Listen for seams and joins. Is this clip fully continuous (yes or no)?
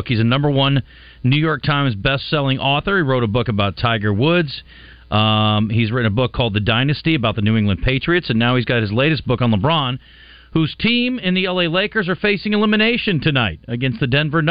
yes